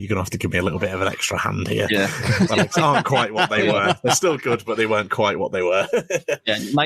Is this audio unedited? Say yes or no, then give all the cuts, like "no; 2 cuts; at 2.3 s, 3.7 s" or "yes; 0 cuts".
yes; 0 cuts